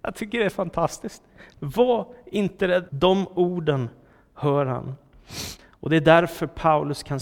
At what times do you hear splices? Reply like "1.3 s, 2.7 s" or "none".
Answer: 2.9 s, 5.6 s